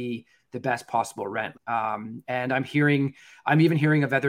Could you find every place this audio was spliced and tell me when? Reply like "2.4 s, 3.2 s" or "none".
1.5 s